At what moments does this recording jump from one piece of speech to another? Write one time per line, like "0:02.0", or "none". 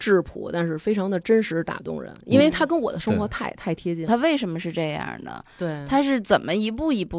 0:04.1